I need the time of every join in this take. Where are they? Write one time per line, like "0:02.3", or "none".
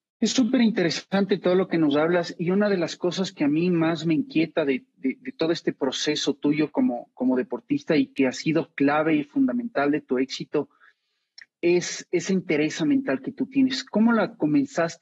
none